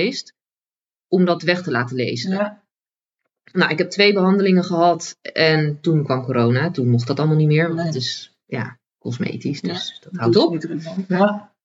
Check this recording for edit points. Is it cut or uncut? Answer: uncut